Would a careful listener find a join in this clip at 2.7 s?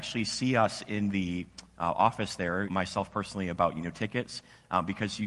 yes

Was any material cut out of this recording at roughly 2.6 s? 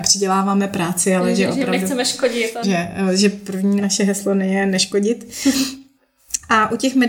yes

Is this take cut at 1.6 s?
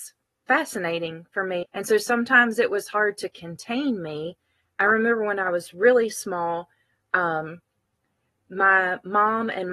yes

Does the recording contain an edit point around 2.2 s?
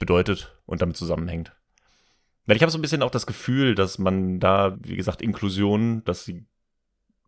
no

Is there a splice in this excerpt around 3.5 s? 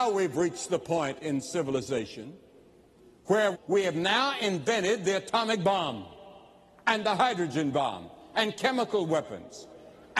yes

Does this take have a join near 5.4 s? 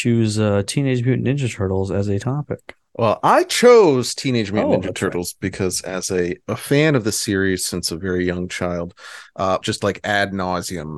no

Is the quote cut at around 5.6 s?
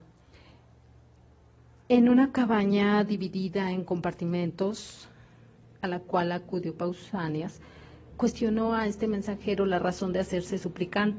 no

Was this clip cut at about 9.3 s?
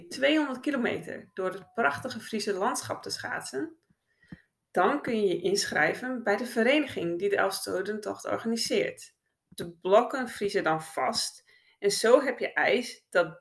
yes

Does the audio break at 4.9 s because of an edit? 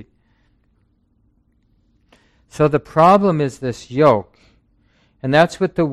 no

